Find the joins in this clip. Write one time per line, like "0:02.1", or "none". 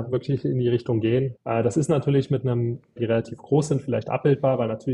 0:01.4
0:03.0